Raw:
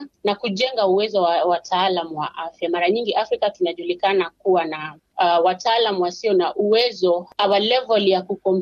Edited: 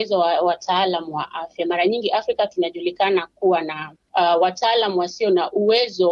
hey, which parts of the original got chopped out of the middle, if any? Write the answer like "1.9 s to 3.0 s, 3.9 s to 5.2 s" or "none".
none